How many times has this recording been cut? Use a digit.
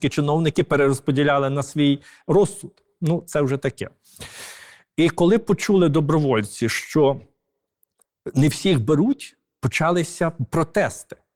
0